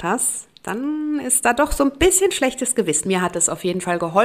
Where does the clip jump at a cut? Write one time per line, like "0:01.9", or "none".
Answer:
0:03.0